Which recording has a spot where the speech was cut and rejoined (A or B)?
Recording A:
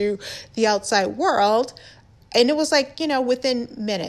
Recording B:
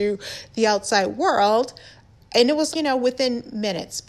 B